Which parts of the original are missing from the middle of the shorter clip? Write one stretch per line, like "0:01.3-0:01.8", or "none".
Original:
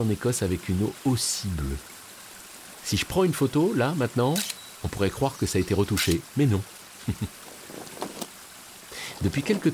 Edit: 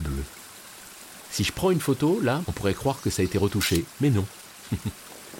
0:03.9-0:04.8